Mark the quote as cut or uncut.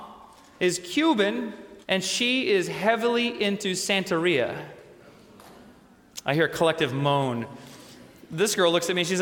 cut